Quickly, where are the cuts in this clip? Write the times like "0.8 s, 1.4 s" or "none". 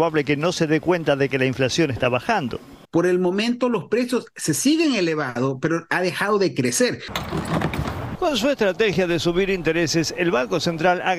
2.8 s, 8.1 s